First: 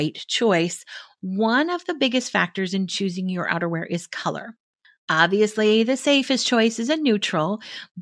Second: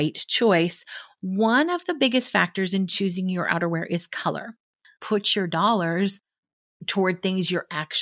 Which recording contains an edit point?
second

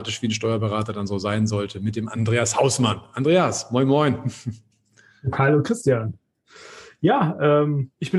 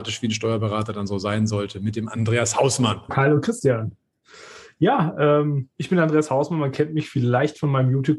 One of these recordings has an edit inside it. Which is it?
second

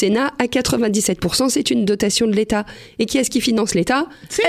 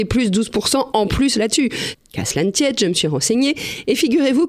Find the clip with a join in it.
second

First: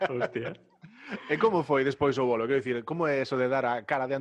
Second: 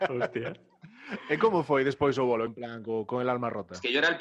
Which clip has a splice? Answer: second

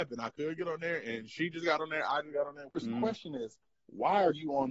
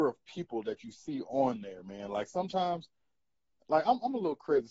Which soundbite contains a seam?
first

